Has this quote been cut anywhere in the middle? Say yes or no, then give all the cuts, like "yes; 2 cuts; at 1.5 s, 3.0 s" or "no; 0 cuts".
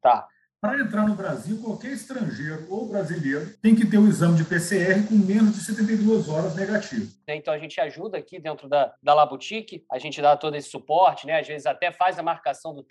yes; 1 cut; at 7.3 s